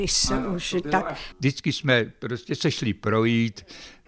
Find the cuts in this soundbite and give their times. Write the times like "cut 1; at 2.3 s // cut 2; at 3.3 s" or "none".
cut 1; at 1.3 s